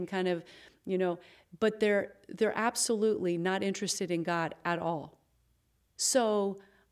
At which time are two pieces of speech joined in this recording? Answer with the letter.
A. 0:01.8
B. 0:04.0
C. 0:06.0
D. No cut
C